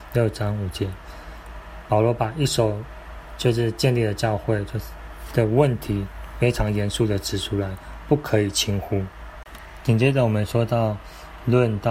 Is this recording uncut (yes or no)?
yes